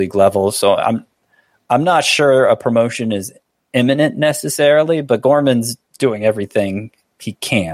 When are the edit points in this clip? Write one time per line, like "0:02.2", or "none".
0:05.9

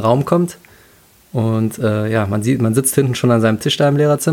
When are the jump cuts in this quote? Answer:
none

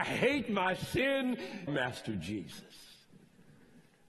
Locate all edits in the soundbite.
0:01.7

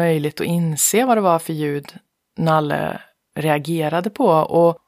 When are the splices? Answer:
none

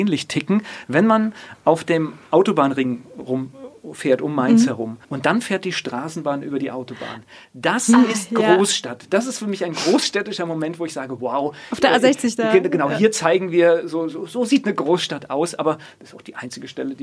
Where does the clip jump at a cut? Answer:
0:05.0

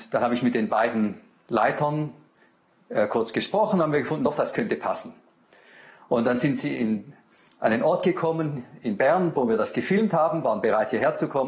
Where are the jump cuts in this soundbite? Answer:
none

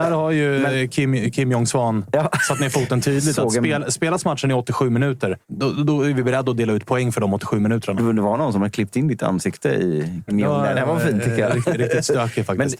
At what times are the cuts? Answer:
0:05.4
0:10.3

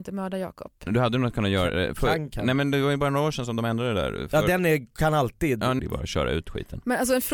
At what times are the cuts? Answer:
0:05.8

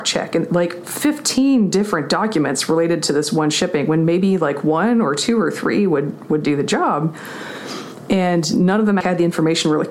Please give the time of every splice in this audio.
0:09.0

